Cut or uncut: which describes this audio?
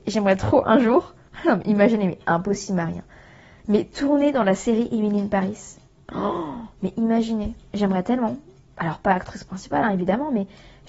uncut